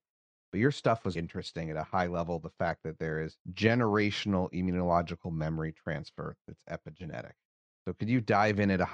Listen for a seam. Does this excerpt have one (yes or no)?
yes